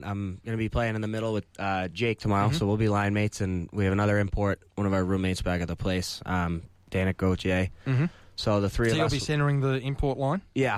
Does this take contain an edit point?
no; 0 cuts

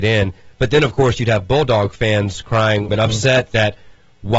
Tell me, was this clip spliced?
yes; 1 cut; at 2.9 s

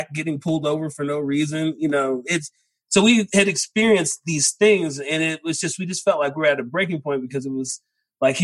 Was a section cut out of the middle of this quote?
no; 0 cuts

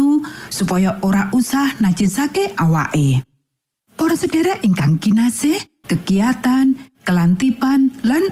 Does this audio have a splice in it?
yes; 1 cut; at 5.8 s

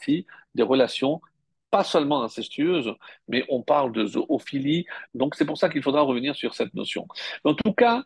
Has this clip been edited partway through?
yes; 1 cut; at 5.1 s

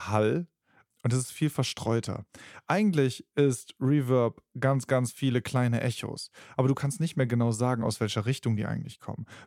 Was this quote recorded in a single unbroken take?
yes; 0 cuts

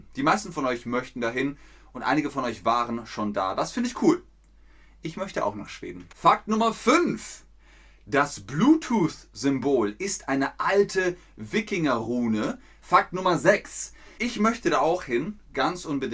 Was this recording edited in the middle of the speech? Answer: yes; 3 cuts; at 6.1 s, 12.8 s, 14.2 s

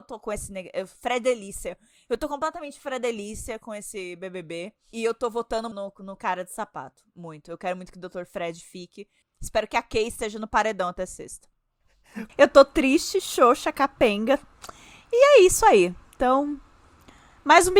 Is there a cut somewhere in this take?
yes; 3 cuts; at 5.7 s, 9.2 s, 12.3 s

